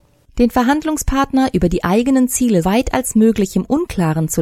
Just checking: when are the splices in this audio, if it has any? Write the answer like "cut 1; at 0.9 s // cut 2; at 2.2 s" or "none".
cut 1; at 2.6 s